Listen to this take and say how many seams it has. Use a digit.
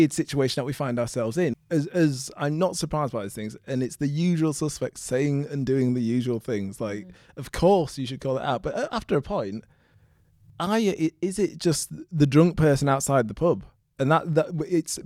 1